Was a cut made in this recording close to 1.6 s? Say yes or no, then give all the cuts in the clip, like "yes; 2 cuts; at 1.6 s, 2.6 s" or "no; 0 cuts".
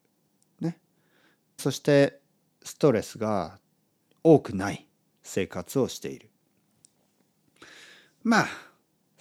yes; 1 cut; at 1.6 s